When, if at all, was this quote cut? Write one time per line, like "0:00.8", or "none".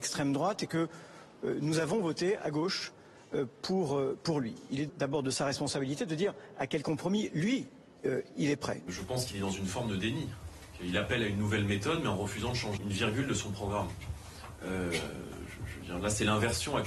0:04.9
0:12.8